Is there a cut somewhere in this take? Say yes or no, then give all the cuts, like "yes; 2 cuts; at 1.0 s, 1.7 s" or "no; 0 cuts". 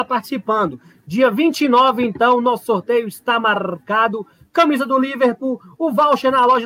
no; 0 cuts